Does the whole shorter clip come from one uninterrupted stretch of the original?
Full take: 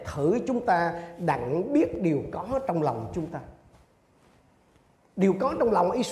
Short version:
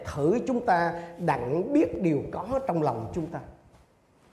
yes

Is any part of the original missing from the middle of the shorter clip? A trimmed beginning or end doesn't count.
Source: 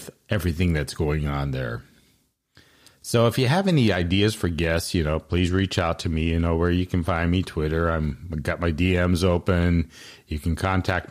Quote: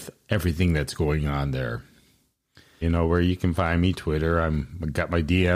yes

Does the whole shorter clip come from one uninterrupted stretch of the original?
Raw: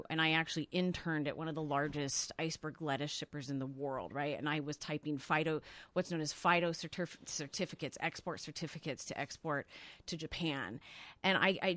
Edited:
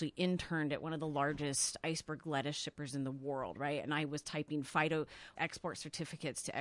no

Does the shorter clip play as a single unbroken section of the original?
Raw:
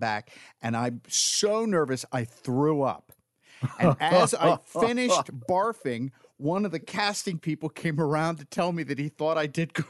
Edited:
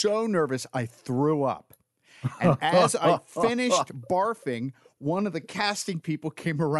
yes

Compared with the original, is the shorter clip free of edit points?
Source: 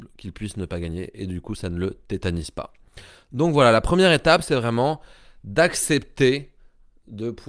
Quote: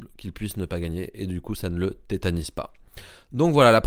yes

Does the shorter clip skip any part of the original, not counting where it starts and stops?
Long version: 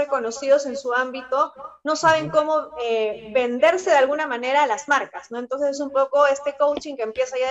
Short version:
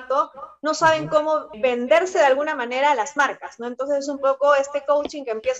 yes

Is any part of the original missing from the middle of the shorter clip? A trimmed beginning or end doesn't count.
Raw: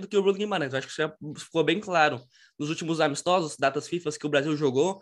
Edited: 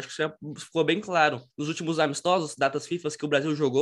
yes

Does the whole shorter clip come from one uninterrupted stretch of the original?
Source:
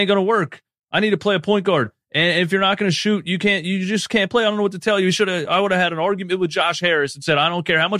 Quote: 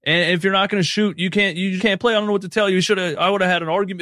no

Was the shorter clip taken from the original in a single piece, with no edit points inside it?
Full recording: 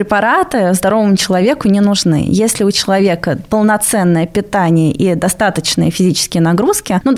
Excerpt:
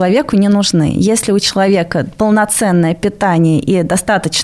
yes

